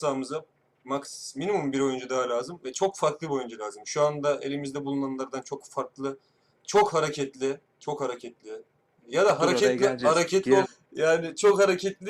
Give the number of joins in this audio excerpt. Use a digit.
1